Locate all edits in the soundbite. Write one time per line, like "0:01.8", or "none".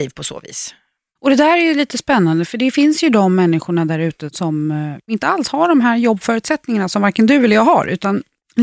none